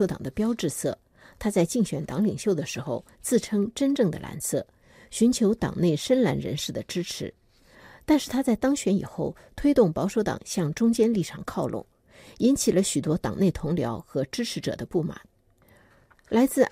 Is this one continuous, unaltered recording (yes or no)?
yes